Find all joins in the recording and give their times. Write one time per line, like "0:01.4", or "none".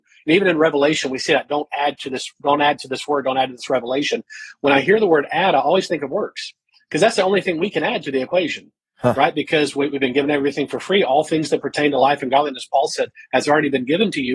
none